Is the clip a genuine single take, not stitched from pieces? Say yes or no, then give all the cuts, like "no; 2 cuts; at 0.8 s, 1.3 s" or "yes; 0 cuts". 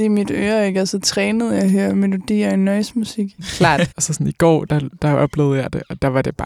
no; 1 cut; at 3.9 s